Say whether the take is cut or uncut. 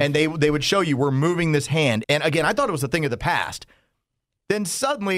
cut